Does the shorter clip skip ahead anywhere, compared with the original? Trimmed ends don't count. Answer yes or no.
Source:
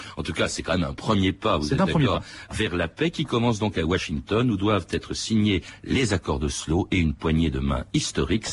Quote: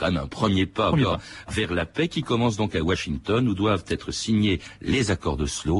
yes